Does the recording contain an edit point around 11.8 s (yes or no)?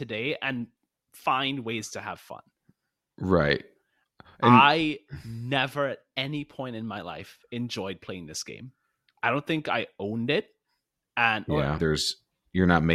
yes